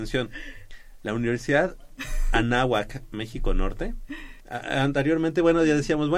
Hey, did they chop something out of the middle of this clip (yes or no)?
yes